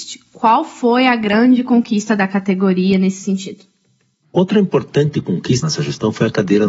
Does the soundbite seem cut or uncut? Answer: cut